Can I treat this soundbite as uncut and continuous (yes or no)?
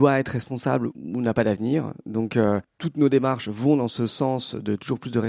yes